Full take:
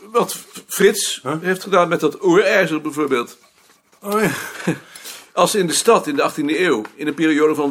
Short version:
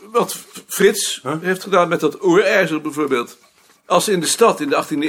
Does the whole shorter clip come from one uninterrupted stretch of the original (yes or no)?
no